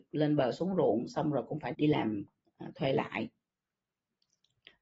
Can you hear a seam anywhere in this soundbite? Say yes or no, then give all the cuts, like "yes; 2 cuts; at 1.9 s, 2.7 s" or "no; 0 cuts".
yes; 1 cut; at 1.7 s